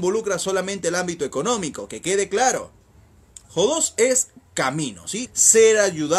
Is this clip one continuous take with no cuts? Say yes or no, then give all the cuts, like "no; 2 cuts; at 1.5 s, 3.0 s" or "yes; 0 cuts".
no; 2 cuts; at 3.4 s, 5.3 s